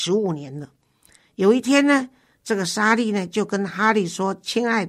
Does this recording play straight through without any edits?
yes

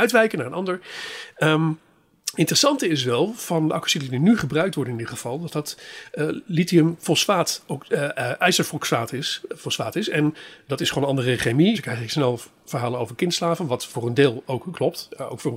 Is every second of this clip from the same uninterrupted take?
no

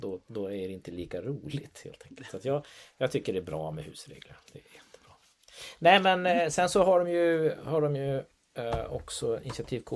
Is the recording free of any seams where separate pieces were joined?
yes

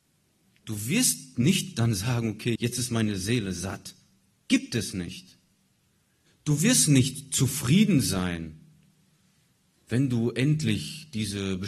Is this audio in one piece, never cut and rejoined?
no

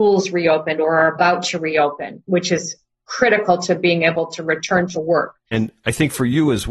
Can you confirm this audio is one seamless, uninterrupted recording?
no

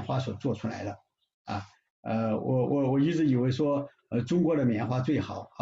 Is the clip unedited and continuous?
yes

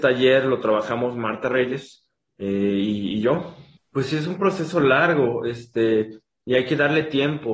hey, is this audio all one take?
no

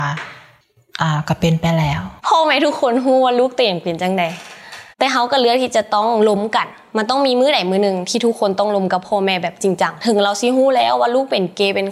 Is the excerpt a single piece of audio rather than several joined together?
no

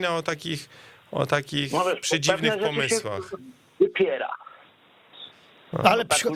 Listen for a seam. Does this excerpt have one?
no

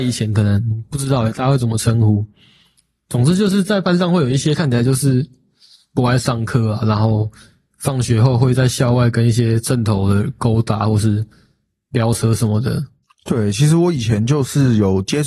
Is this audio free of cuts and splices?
yes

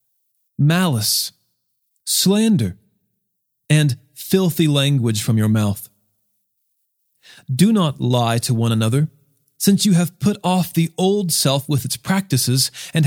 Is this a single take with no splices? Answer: yes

